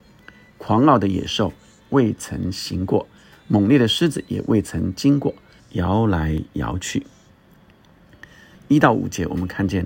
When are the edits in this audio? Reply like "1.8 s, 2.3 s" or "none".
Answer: 5.6 s, 8.5 s

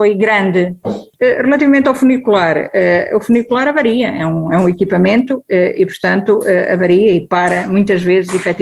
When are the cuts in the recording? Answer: none

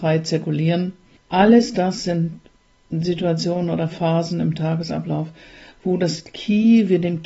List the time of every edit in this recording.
1.2 s

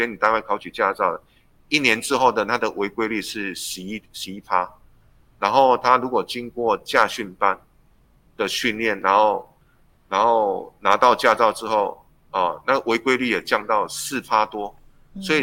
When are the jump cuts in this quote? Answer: none

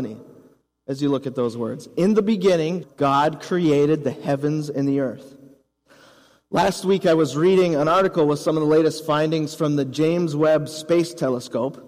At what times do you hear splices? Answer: 2.8 s

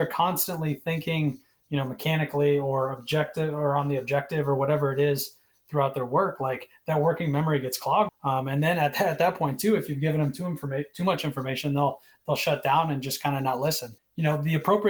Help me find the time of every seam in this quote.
8.1 s, 14.0 s

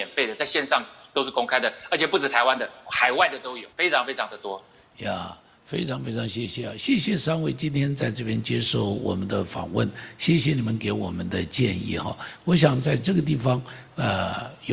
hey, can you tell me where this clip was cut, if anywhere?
3.7 s

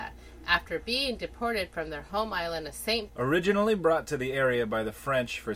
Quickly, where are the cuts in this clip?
3.1 s

